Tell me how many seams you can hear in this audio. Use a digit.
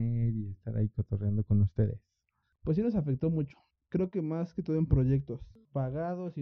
0